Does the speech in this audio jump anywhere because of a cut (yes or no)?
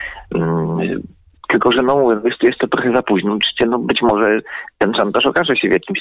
no